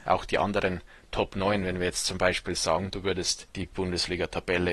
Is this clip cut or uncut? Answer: uncut